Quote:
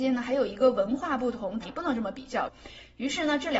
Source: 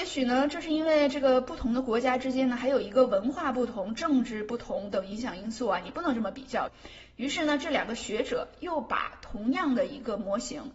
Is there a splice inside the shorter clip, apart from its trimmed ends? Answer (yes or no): yes